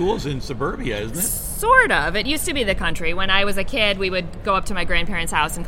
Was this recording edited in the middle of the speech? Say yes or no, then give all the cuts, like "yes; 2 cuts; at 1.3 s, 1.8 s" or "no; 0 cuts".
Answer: no; 0 cuts